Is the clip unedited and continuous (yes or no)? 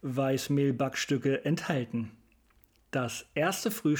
no